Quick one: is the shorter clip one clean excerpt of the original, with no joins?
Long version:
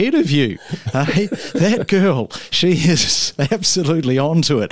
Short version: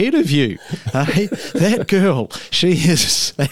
yes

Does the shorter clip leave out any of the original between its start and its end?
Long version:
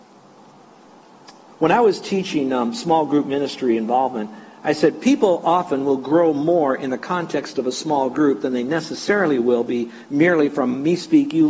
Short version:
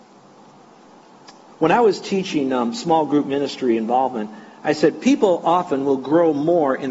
no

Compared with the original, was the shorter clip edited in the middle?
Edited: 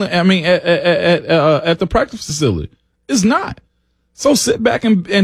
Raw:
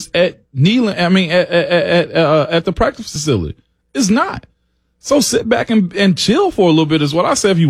no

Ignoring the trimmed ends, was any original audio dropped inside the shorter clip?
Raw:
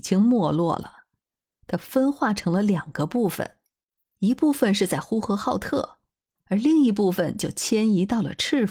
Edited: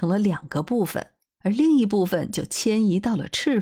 yes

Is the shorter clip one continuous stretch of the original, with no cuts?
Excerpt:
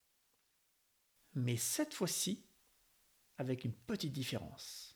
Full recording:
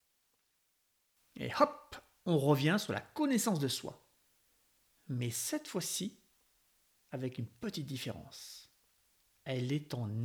no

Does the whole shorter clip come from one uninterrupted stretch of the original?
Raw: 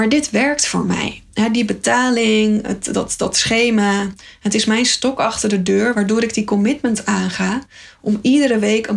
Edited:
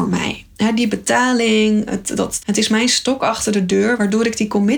no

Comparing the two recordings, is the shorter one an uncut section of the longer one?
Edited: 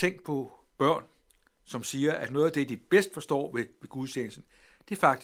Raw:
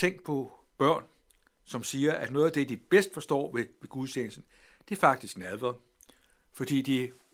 yes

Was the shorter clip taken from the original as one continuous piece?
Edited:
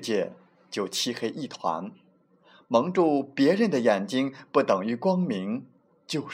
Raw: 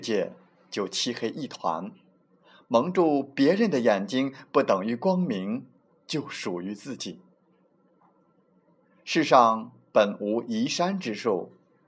yes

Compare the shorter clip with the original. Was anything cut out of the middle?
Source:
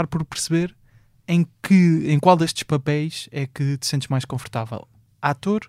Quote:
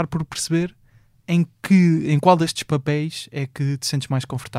no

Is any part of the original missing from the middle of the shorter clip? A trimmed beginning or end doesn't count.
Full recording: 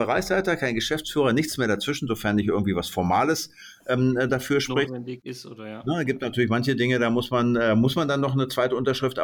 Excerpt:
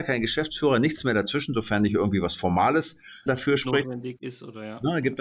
yes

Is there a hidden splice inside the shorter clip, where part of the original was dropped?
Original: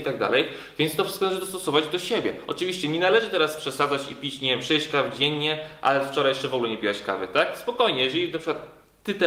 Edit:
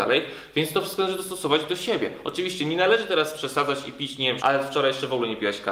yes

